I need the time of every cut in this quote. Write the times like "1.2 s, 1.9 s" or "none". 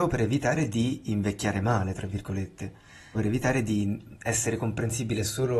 3.1 s